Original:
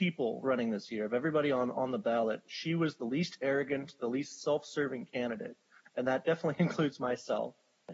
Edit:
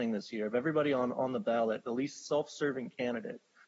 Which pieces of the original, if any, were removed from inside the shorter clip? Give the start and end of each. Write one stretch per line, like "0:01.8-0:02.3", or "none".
0:02.4-0:04.0